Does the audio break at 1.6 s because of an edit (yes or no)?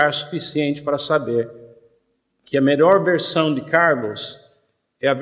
no